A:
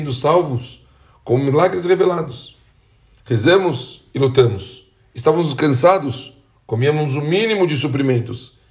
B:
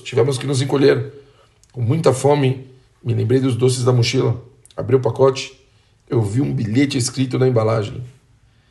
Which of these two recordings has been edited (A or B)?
B